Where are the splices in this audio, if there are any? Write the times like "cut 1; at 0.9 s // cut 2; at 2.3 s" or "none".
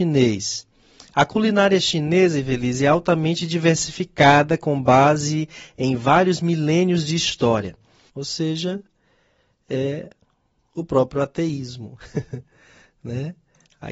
cut 1; at 8.1 s